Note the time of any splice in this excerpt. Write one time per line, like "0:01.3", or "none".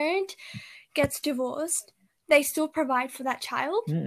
none